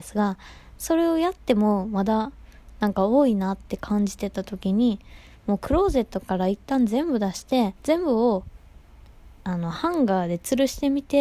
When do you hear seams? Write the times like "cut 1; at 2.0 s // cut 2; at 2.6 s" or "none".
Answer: cut 1; at 7.8 s